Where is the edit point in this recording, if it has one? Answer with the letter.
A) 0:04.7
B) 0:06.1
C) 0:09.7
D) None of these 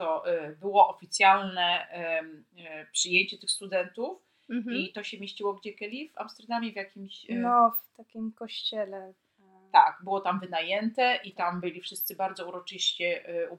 D